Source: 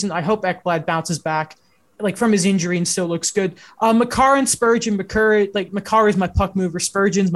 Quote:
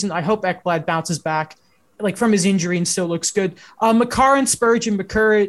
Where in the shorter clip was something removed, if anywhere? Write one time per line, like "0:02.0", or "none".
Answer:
none

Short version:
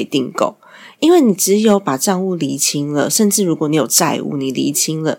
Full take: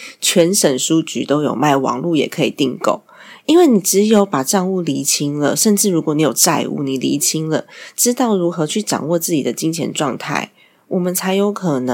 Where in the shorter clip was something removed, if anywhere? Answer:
none

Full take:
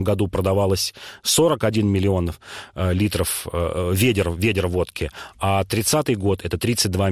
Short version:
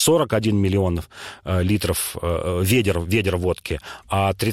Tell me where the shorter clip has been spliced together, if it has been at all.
none

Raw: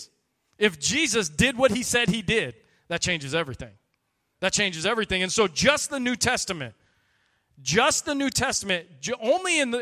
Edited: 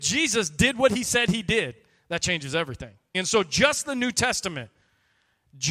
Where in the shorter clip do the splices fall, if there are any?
0:03.1

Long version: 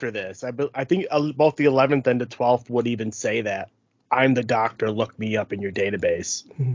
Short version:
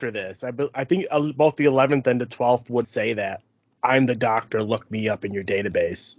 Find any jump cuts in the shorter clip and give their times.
0:02.8

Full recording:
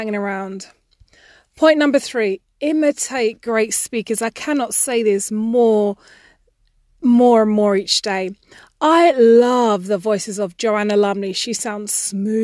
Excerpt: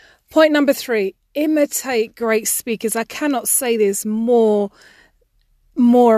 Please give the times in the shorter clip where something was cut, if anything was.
none

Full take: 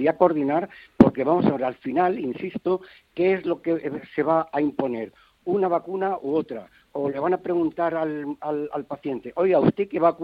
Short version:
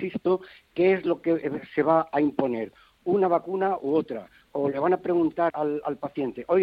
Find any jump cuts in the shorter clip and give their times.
0:05.5

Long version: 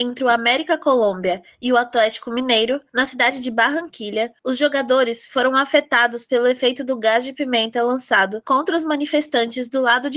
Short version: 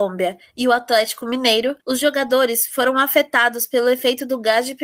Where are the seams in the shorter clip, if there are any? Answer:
0:01.8

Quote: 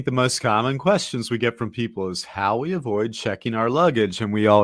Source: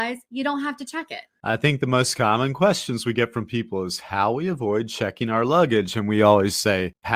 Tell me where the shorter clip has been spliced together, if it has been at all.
none

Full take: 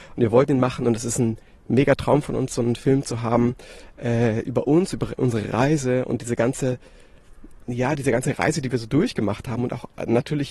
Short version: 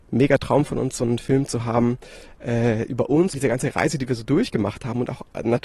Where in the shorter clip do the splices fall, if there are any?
0:03.3

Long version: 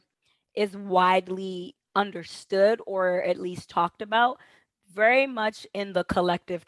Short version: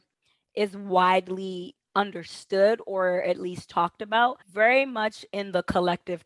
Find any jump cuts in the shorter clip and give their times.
0:04.4

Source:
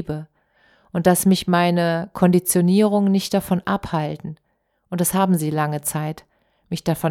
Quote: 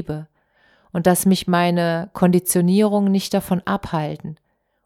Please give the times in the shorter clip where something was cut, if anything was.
none

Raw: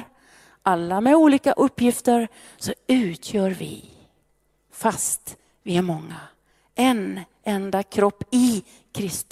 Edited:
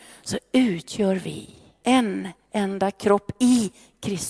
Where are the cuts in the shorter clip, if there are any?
0:01.8

